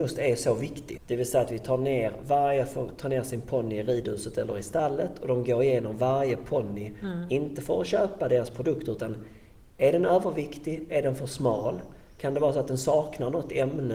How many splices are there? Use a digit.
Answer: 1